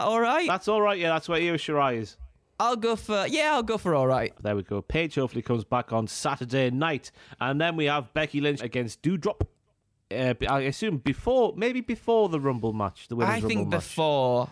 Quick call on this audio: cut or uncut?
cut